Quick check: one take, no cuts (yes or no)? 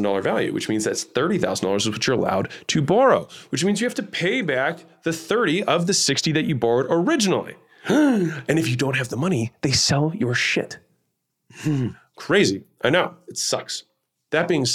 yes